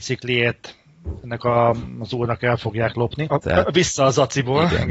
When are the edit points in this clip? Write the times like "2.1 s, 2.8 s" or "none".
3.3 s